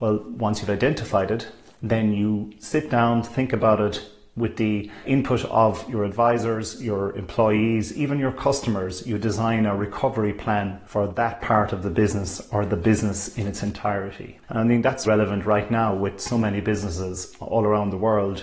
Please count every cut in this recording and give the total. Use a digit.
1